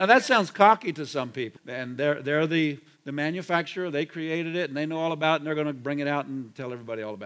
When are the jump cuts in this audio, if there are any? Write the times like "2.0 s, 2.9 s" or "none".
1.6 s